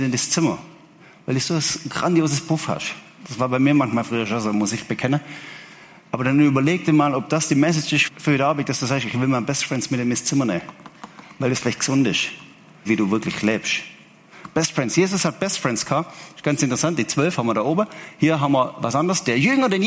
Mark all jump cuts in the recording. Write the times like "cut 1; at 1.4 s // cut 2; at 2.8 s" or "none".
cut 1; at 8.1 s // cut 2; at 12.9 s